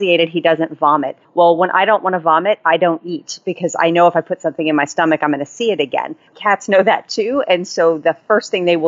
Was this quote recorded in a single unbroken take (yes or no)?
yes